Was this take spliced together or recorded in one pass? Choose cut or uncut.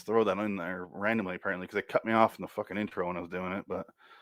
uncut